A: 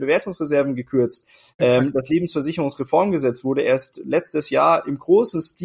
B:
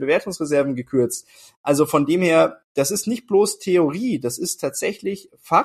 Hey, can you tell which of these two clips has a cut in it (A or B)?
A